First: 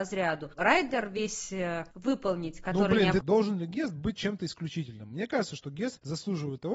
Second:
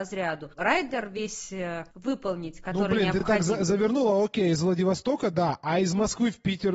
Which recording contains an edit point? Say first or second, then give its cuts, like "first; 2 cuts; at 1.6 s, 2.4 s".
first; 1 cut; at 3.2 s